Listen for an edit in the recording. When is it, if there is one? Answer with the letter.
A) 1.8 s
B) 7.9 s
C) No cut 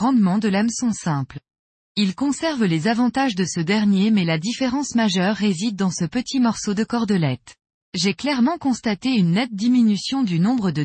B